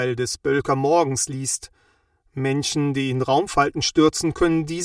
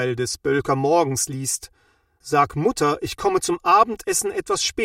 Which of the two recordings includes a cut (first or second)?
second